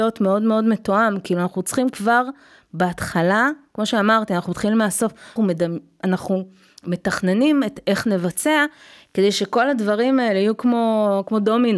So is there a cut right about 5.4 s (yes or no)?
yes